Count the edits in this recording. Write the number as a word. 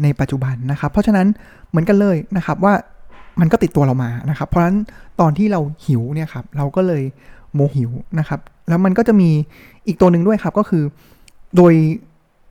one